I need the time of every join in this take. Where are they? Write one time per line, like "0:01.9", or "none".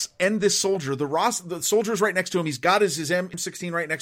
none